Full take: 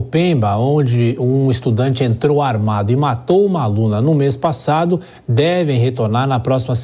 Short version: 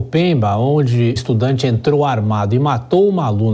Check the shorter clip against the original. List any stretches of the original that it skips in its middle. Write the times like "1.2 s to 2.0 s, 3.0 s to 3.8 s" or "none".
1.2 s to 1.5 s